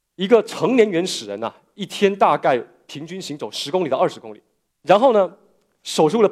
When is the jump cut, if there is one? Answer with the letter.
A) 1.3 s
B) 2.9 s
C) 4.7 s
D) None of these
C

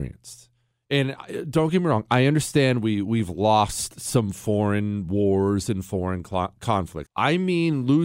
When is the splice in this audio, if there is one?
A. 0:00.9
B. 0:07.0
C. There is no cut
B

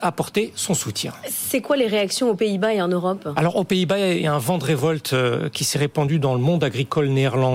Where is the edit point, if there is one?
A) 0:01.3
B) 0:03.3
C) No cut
A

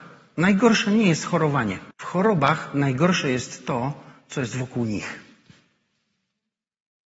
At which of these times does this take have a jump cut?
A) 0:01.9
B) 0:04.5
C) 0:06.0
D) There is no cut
A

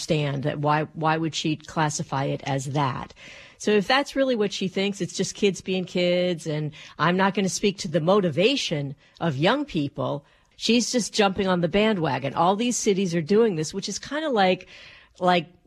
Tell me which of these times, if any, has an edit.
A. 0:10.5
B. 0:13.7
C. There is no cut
A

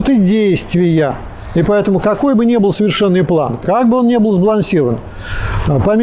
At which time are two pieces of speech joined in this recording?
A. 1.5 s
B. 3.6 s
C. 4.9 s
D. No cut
B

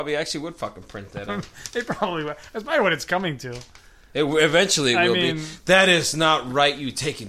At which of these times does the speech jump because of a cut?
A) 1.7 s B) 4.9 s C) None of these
C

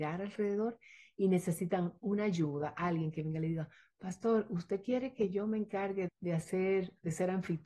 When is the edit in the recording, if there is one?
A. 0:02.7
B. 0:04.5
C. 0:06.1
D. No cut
C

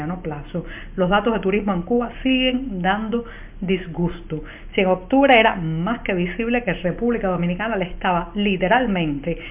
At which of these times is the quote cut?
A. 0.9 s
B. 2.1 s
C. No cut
B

